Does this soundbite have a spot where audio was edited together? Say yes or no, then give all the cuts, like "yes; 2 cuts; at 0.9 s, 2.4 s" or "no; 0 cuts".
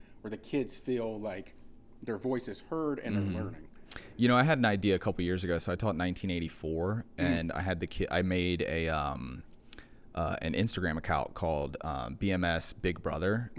no; 0 cuts